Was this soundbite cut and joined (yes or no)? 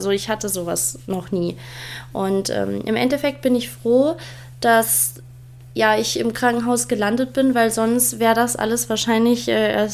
no